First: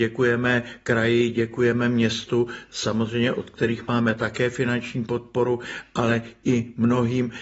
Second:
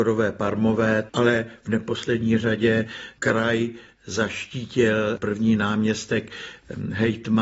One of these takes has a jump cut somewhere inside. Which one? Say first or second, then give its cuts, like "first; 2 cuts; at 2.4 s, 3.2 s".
second; 1 cut; at 1.1 s